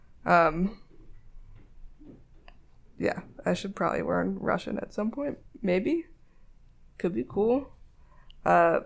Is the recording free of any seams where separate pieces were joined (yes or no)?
yes